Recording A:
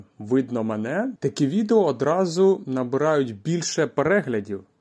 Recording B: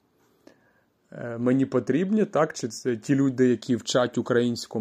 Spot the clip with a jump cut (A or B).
A